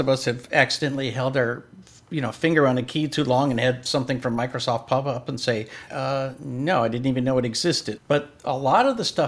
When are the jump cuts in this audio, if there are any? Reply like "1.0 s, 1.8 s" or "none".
5.9 s, 8.0 s